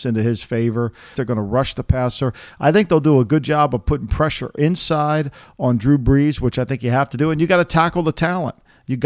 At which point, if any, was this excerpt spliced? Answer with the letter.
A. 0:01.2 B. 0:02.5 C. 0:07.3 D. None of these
A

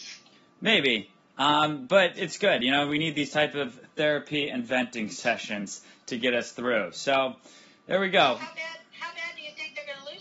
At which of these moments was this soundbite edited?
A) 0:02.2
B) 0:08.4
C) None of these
A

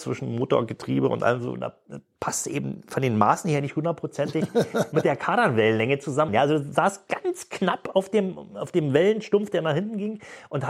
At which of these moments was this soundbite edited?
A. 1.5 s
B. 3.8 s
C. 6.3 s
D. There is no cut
C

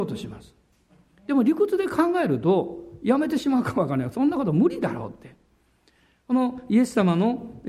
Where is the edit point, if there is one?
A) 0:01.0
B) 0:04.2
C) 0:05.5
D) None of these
D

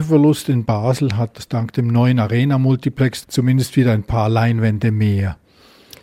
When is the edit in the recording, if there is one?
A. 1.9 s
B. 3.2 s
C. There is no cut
B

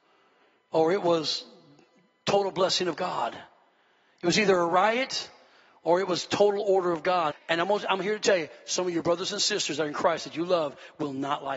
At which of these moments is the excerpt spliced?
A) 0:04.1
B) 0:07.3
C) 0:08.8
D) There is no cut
B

